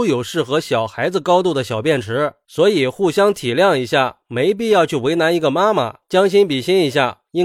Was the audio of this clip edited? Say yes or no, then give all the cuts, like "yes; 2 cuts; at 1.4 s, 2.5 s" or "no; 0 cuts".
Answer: yes; 1 cut; at 6.0 s